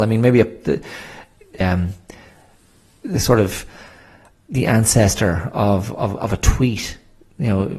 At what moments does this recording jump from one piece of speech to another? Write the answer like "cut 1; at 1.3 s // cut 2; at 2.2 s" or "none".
cut 1; at 1.6 s